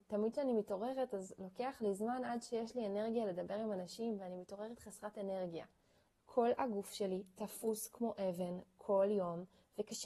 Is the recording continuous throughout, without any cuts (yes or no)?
no